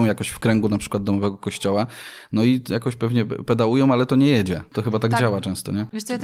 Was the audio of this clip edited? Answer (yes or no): no